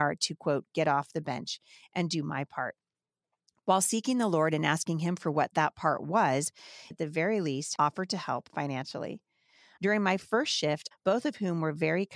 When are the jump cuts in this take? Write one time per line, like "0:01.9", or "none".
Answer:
0:06.9
0:09.8
0:10.9